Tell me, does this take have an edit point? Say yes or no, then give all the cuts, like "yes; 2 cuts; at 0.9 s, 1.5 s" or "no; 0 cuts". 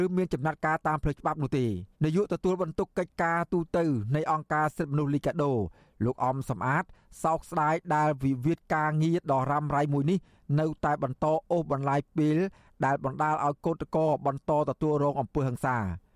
yes; 1 cut; at 1.9 s